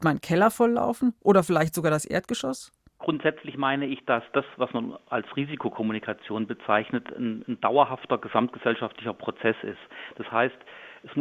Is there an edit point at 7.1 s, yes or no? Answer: no